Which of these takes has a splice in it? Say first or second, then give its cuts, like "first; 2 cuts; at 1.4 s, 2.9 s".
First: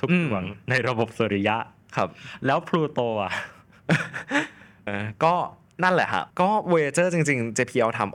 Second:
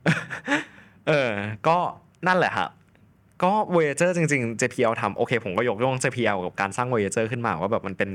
first; 2 cuts; at 4.9 s, 6.3 s